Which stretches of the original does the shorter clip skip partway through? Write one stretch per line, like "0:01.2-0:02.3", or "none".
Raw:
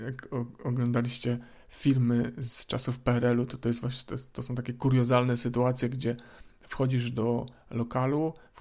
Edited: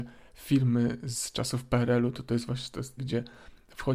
0:04.3-0:05.9